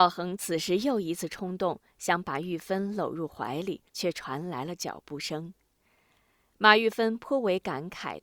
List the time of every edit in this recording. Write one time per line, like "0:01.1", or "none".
0:03.9